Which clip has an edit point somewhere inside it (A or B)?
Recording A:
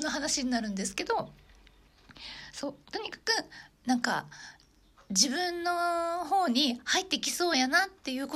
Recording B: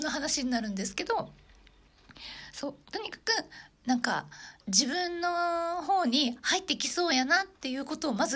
B